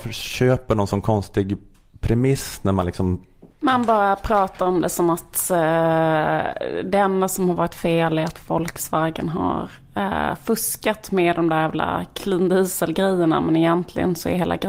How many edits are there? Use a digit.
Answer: 1